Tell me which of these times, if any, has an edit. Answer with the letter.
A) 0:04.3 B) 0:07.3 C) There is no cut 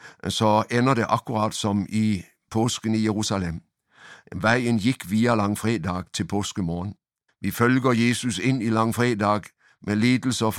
B